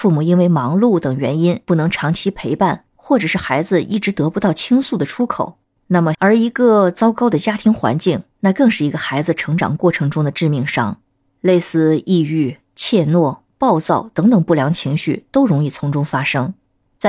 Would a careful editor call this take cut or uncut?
cut